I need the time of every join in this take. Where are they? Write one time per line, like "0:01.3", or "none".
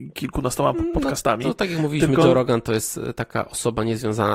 none